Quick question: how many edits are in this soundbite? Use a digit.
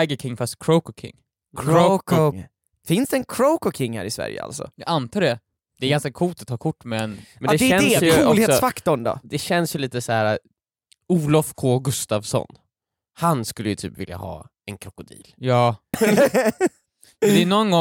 2